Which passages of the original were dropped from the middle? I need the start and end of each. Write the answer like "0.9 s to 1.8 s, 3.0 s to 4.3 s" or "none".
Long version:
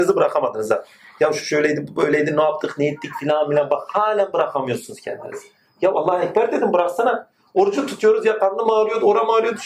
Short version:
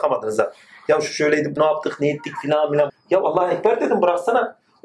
1.9 s to 2.3 s, 3.7 s to 5.6 s